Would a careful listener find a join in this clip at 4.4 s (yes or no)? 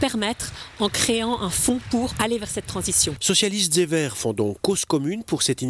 no